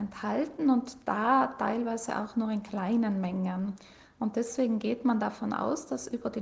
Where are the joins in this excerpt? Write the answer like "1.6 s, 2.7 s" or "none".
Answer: none